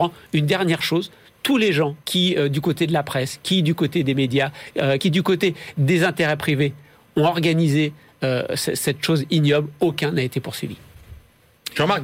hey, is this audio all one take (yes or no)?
no